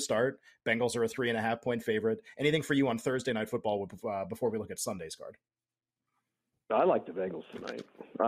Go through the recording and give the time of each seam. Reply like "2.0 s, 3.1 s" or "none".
none